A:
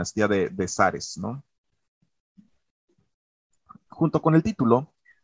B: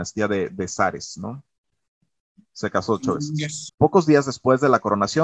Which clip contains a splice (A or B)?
B